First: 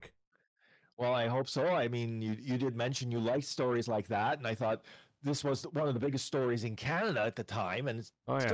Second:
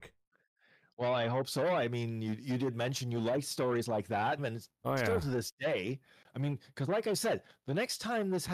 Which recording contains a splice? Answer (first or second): second